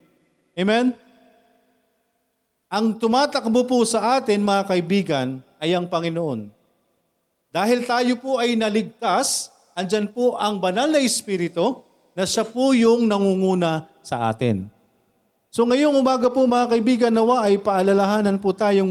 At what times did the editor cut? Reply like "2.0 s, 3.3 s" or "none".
none